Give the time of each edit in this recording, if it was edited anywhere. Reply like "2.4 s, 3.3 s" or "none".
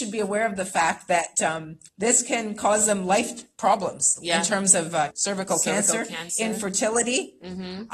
1.9 s, 5.1 s